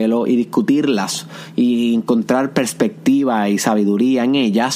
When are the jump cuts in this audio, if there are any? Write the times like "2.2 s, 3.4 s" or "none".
none